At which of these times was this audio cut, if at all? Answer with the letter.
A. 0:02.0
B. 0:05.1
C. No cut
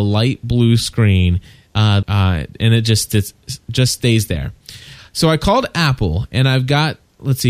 A